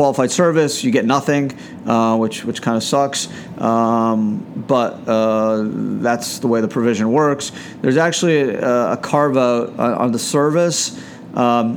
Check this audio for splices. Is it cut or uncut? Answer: uncut